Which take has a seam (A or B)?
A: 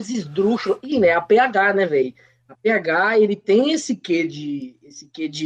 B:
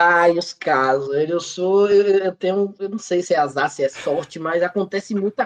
A